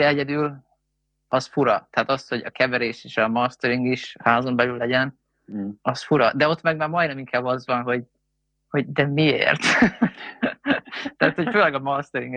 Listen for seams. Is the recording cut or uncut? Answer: uncut